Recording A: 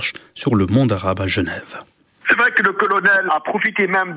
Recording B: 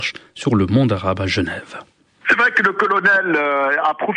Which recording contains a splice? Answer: A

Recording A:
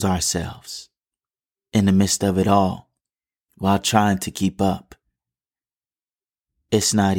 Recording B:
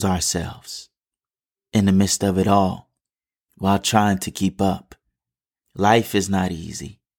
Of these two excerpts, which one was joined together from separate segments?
B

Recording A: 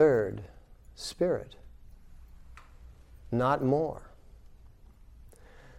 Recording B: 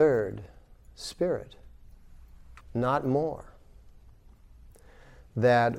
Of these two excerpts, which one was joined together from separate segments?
B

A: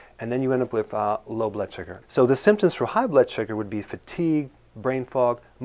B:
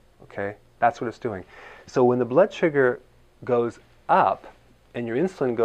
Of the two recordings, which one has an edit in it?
A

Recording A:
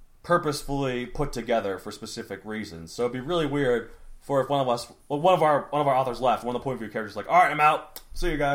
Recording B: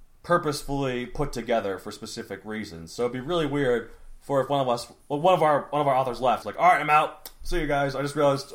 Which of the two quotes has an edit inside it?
B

